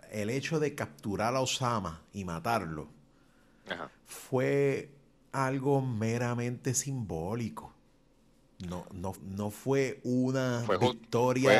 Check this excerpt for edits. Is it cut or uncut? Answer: cut